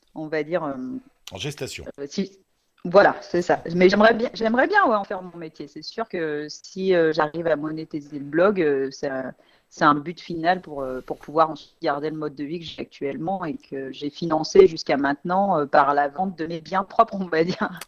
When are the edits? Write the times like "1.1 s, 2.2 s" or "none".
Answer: none